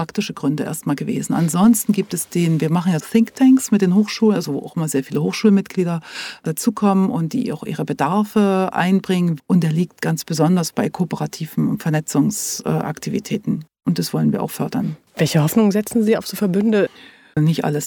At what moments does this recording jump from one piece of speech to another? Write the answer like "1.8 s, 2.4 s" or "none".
3.0 s